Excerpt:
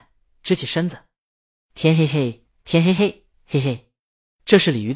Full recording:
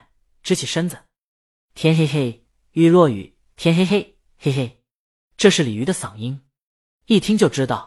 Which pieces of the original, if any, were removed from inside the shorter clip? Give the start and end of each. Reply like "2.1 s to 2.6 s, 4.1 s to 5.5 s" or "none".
2.6 s to 3.5 s